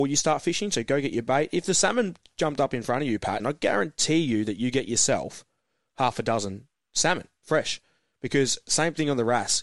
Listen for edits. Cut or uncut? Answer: cut